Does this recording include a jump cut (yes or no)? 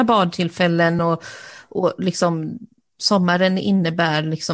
no